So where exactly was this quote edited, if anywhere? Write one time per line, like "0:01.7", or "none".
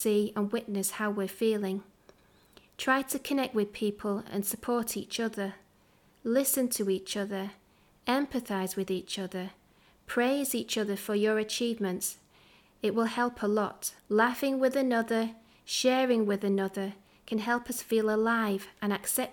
0:14.0

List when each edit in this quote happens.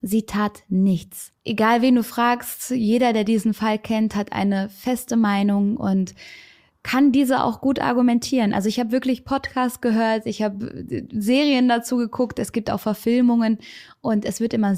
0:01.3

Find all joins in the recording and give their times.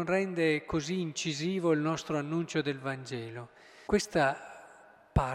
0:03.9

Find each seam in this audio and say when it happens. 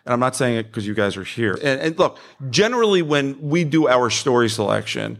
0:01.6

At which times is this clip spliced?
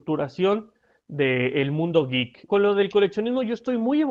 0:02.5

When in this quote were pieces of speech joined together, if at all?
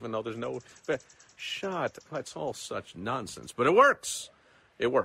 none

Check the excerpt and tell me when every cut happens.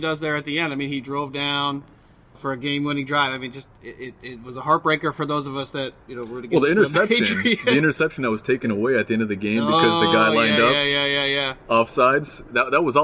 0:02.3

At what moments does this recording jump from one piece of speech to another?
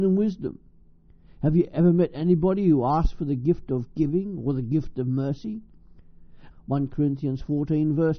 0:06.5

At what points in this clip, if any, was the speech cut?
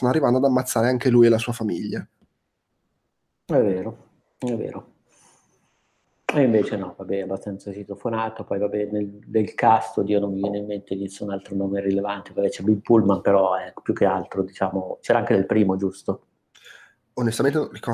none

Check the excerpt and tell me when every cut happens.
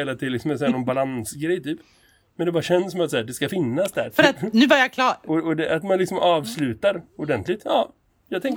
none

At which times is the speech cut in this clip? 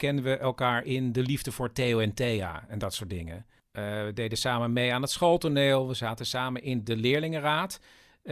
none

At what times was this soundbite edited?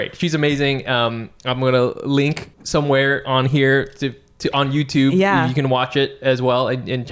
0:02.5

